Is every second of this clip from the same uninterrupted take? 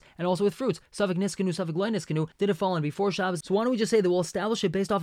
no; 2 cuts; at 2.3 s, 3.4 s

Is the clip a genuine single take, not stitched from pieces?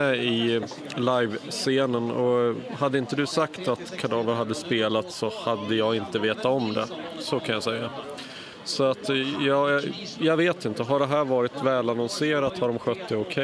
yes; 0 cuts

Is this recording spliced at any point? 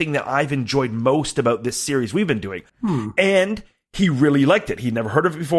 yes; 1 cut; at 2.7 s

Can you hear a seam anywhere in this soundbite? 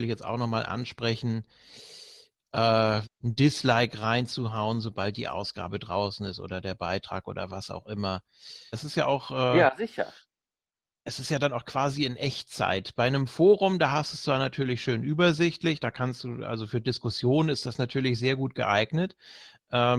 yes; 2 cuts; at 3.0 s, 8.7 s

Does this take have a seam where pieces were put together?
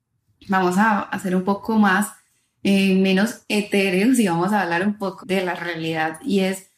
yes; 1 cut; at 5.2 s

